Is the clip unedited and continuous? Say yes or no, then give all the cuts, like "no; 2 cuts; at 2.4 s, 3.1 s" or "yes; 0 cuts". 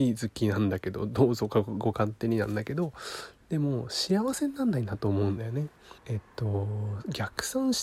no; 1 cut; at 6.0 s